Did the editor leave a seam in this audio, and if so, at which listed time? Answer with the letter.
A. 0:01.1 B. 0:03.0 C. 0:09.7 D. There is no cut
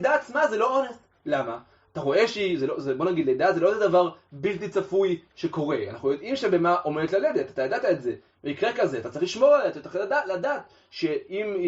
D